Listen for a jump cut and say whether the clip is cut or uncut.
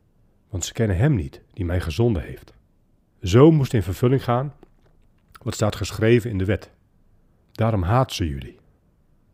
cut